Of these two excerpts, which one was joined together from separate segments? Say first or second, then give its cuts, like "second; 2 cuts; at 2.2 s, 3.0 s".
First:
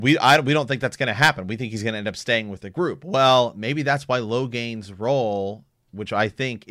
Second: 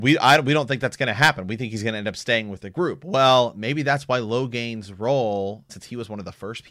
second; 1 cut; at 5.7 s